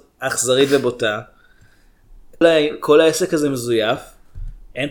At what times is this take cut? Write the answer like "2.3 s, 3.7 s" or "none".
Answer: 2.4 s

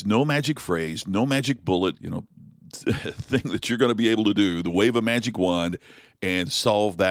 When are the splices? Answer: 2.0 s

